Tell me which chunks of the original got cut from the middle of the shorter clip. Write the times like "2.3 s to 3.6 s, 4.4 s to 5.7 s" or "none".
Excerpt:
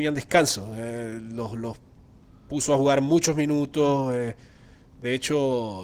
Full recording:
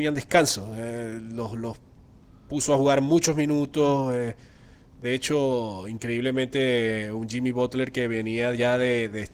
none